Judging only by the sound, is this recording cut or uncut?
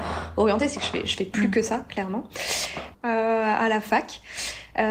cut